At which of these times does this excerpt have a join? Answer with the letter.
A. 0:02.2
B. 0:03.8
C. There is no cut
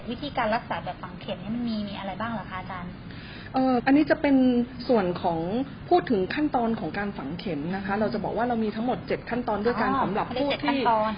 B